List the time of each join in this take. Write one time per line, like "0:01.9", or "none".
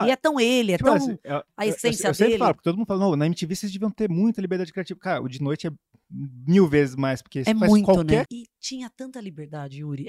0:08.3